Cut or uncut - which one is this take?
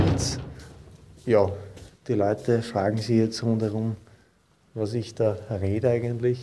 uncut